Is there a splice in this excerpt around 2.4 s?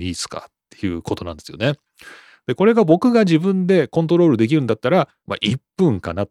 no; 1 cut; at 5.2 s

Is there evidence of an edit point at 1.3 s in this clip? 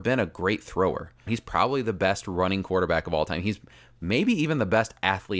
yes; 1 cut; at 1.3 s

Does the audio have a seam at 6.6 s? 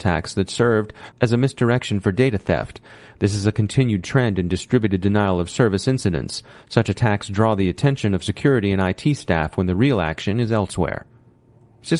no; 1 cut; at 1.1 s

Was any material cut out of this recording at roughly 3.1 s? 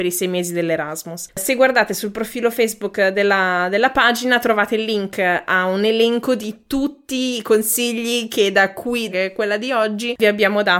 no; 2 cuts; at 1.3 s, 9.1 s

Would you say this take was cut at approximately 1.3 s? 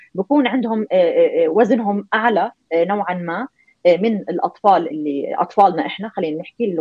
no; 1 cut; at 4.9 s

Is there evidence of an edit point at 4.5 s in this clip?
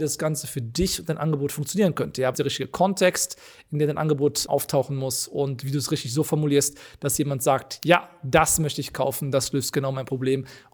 yes; 2 cuts; at 2.3 s, 4.5 s

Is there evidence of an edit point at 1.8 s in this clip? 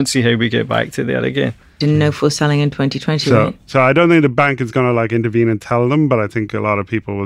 yes; 1 cut; at 1.8 s

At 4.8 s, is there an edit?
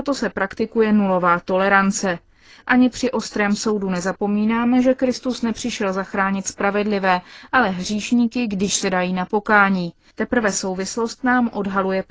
no; 1 cut; at 10.1 s

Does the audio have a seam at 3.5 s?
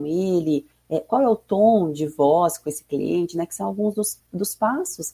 no; 0 cuts

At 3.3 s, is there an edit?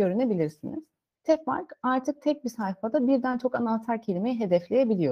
no; 1 cut; at 1.2 s

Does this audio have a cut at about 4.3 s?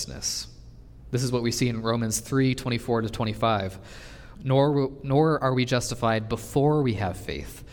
yes; 1 cut; at 4.3 s

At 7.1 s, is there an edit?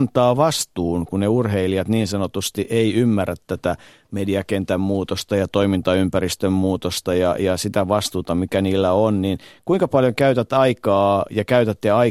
no; 0 cuts

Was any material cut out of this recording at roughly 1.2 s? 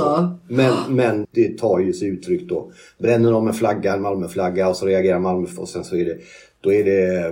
yes; 1 cut; at 1.2 s

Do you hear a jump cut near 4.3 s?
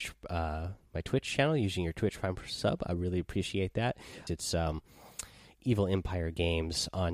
yes; 1 cut; at 4.3 s

